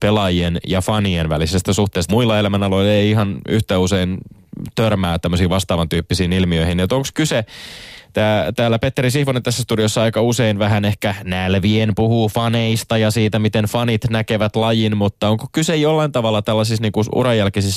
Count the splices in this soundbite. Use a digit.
1